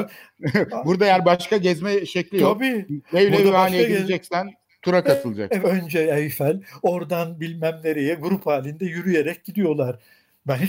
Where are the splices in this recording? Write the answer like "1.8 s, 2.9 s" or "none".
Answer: 5.6 s